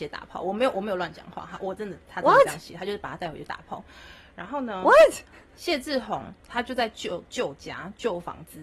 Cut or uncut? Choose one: uncut